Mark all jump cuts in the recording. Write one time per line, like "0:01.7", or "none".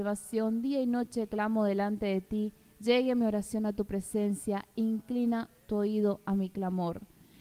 none

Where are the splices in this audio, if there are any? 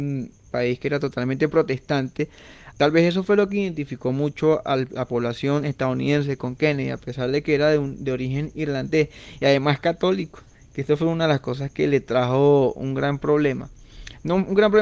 0:02.7

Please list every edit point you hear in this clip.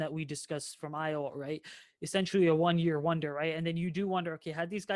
none

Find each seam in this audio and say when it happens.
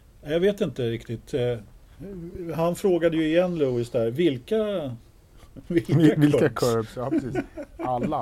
none

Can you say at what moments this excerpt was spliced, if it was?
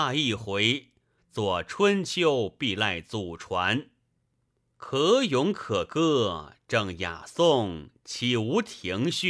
0:01.2

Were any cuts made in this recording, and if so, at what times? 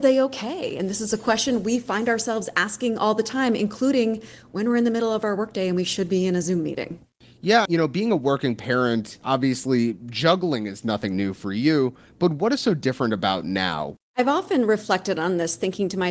0:07.7

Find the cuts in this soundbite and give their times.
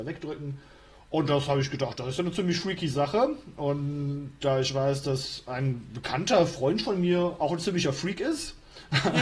0:01.0

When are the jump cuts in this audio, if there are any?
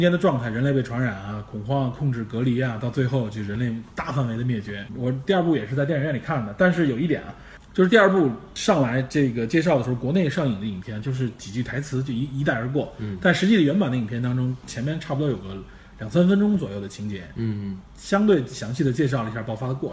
0:04.9

